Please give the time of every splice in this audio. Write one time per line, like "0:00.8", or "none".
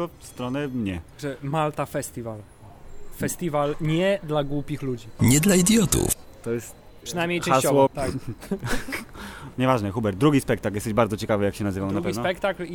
0:07.9